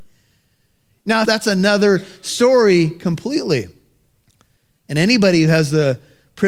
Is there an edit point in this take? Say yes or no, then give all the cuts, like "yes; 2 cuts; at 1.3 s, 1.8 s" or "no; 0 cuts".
yes; 1 cut; at 1.2 s